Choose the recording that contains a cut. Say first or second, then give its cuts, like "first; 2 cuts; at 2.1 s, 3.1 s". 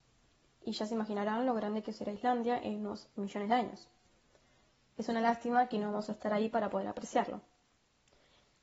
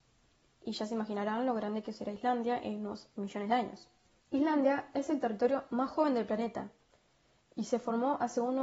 second; 1 cut; at 4.2 s